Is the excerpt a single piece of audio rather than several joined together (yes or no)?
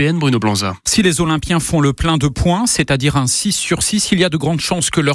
yes